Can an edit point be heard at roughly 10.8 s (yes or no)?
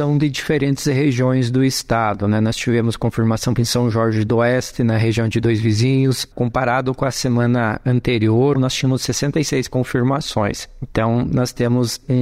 no